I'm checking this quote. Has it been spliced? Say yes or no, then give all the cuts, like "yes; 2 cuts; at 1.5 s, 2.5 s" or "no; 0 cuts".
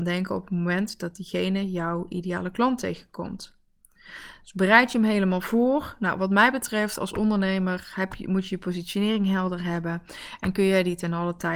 no; 0 cuts